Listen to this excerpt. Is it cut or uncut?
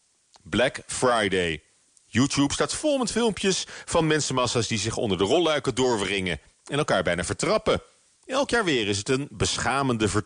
cut